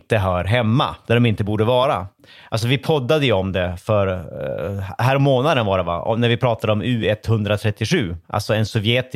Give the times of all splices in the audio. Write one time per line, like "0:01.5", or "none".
none